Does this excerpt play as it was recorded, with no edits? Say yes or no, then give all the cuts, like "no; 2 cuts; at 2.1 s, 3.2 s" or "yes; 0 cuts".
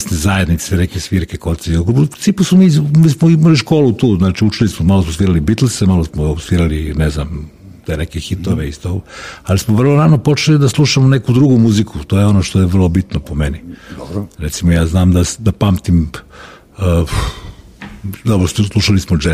yes; 0 cuts